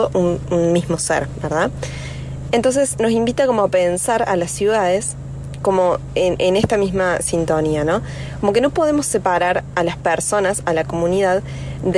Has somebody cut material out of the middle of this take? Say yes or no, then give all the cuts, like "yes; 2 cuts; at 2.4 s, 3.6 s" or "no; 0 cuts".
no; 0 cuts